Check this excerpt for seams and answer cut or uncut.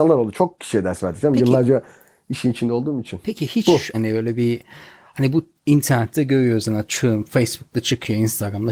cut